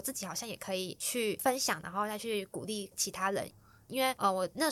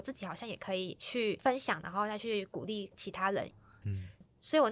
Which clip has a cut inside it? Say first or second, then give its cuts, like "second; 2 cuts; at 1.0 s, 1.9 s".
second; 1 cut; at 3.8 s